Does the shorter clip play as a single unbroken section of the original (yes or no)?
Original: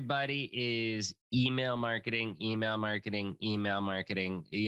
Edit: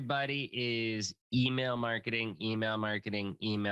yes